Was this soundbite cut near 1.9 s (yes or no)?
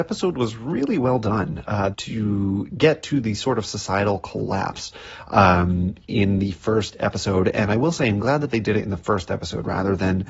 yes